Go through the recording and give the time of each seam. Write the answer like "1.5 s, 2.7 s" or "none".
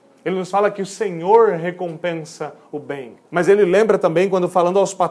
3.2 s